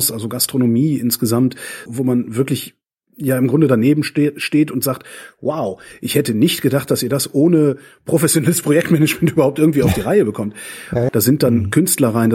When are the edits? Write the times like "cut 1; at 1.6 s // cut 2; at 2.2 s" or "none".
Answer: cut 1; at 1.9 s // cut 2; at 11.1 s